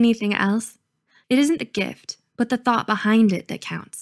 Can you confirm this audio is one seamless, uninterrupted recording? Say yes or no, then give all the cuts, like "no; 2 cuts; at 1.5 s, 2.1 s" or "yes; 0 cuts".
no; 1 cut; at 1.2 s